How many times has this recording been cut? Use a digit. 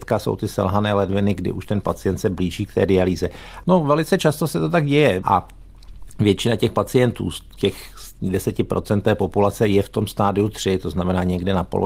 2